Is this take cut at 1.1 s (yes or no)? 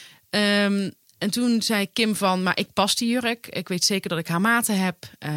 no